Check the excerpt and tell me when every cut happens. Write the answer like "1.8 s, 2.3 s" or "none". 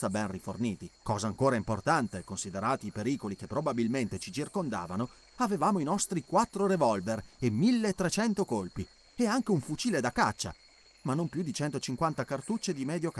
1.0 s